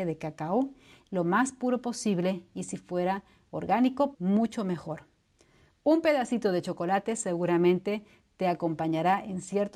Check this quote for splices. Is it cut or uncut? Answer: cut